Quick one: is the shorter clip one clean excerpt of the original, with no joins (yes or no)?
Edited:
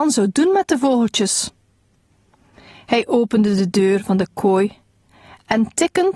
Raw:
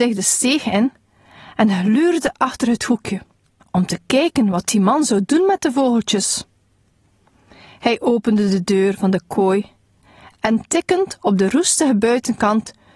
yes